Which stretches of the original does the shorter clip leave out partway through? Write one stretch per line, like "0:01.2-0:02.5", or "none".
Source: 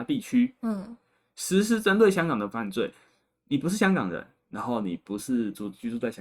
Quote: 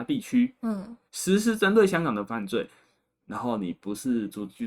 0:01.1-0:01.3
0:03.4-0:04.4